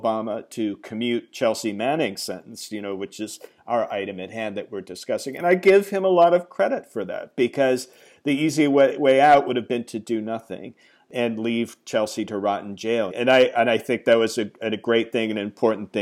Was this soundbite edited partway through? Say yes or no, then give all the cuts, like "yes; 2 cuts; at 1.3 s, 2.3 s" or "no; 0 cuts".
yes; 1 cut; at 13.1 s